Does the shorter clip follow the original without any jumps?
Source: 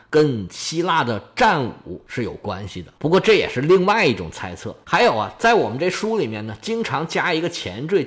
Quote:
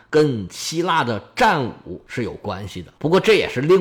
yes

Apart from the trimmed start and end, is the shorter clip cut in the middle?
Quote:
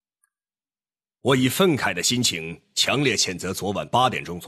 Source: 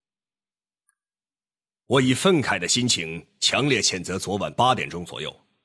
no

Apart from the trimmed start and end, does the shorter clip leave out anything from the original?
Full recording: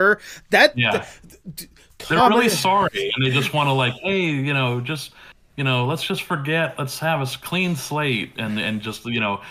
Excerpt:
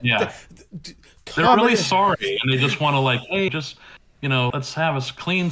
yes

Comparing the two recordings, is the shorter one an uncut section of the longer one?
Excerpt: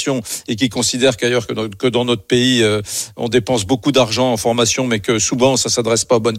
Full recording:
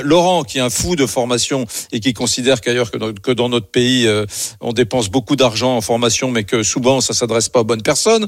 yes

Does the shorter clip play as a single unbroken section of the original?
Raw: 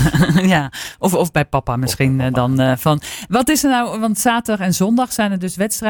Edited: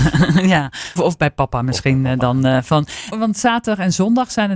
no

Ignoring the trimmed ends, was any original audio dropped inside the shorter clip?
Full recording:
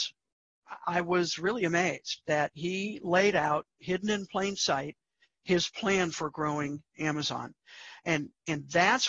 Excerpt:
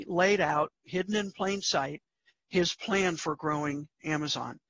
no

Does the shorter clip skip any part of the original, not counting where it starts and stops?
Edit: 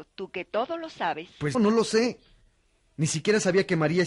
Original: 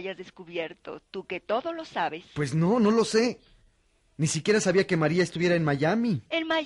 yes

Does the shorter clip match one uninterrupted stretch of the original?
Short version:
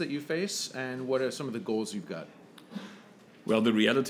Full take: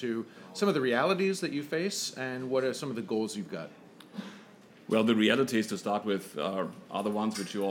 yes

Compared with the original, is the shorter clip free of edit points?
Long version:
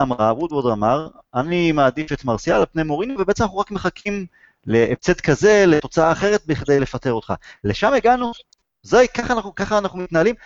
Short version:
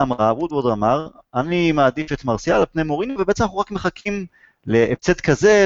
yes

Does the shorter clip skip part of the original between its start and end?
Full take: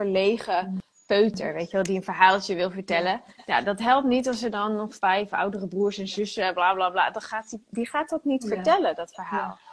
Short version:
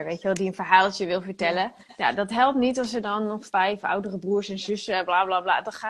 no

